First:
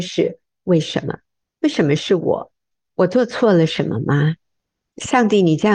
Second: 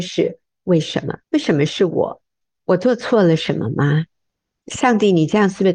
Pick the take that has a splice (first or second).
second